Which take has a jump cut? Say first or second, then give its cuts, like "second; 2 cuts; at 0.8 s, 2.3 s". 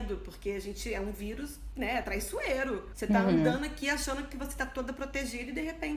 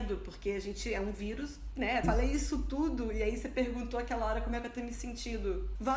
second; 1 cut; at 2.0 s